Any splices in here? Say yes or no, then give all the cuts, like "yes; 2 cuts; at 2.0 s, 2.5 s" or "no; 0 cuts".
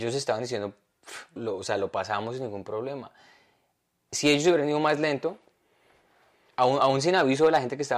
yes; 1 cut; at 1.4 s